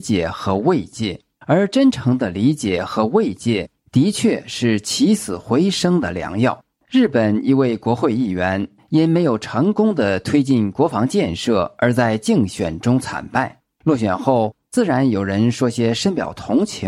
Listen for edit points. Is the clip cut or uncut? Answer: uncut